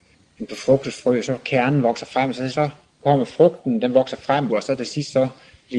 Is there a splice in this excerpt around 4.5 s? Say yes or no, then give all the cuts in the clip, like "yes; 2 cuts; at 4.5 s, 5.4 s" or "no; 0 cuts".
yes; 2 cuts; at 2.5 s, 4.5 s